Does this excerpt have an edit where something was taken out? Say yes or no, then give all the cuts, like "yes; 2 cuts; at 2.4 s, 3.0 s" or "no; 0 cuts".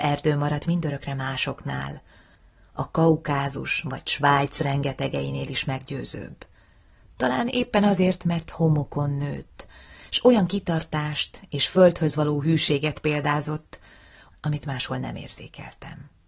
yes; 1 cut; at 14.3 s